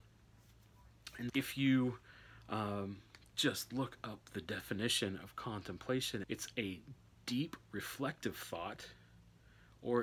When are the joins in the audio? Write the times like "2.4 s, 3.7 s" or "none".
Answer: 1.3 s, 6.2 s